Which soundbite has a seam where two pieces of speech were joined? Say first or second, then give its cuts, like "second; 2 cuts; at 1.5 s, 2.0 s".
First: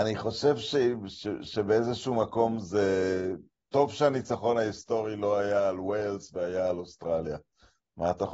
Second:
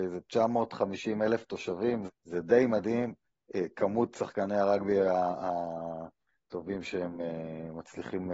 second; 1 cut; at 2.1 s